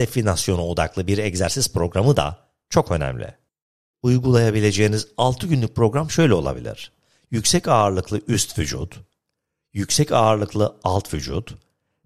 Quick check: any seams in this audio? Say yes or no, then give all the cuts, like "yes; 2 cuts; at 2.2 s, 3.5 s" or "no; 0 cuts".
no; 0 cuts